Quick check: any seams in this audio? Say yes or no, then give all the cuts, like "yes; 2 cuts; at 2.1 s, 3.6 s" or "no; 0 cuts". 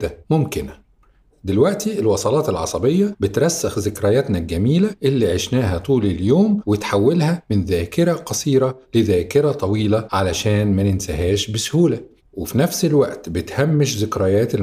no; 0 cuts